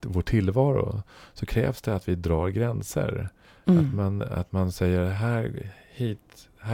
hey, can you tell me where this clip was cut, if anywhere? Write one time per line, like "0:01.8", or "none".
none